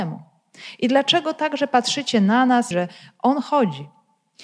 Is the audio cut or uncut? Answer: cut